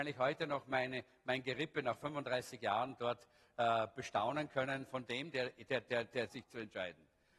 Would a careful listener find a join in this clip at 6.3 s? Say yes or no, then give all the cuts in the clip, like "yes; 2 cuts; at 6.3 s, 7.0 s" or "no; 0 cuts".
yes; 1 cut; at 6.3 s